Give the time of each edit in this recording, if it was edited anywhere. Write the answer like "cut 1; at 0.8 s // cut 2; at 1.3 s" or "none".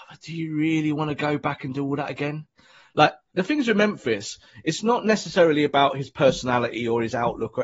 none